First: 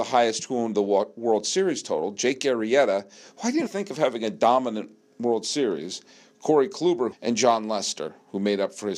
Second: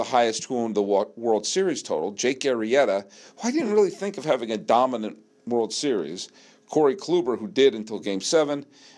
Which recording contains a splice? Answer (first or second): first